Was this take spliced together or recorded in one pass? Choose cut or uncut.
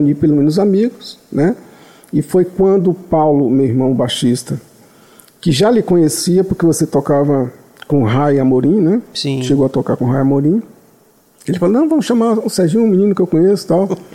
uncut